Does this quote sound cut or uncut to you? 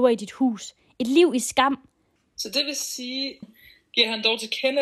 cut